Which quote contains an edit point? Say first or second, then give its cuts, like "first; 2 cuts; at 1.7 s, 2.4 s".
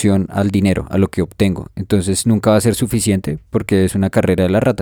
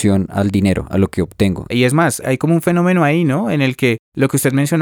second; 1 cut; at 1.7 s